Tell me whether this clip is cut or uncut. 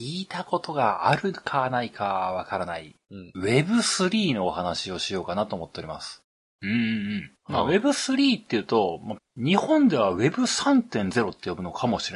cut